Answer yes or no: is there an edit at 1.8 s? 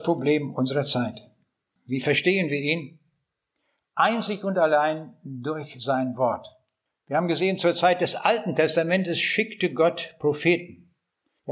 yes